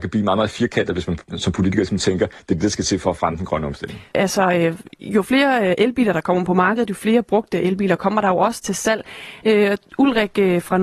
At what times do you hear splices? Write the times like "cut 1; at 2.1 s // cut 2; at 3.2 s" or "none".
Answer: cut 1; at 4.1 s // cut 2; at 9.4 s